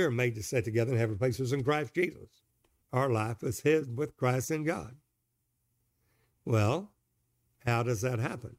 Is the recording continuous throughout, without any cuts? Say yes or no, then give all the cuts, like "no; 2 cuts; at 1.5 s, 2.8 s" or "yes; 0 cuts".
no; 1 cut; at 2.8 s